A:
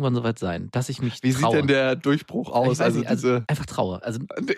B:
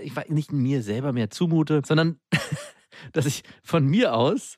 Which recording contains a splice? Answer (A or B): A